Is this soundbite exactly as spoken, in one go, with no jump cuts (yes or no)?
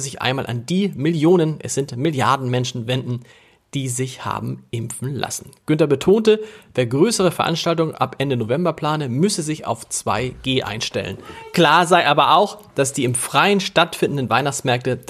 yes